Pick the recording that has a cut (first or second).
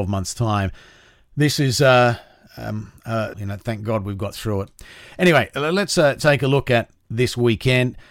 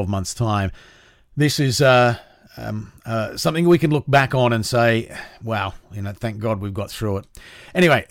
first